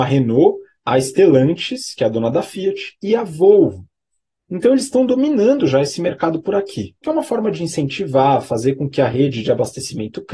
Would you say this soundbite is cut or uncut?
cut